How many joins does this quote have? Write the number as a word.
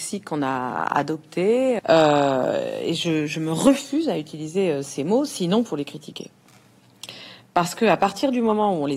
one